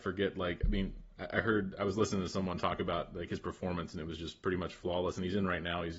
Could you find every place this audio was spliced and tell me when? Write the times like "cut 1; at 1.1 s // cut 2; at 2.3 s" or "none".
none